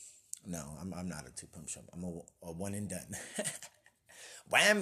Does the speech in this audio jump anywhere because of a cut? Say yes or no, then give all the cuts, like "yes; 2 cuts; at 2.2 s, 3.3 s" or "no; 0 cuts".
no; 0 cuts